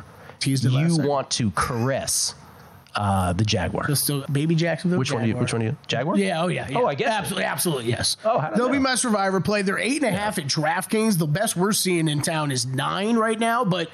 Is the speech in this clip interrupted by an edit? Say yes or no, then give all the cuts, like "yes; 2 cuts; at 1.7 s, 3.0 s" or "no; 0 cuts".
yes; 1 cut; at 4.3 s